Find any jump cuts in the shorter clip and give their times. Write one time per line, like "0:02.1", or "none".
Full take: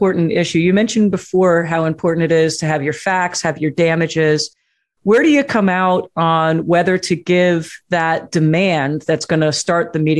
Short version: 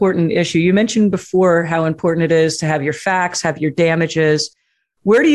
none